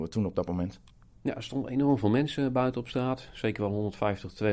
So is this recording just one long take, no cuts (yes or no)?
yes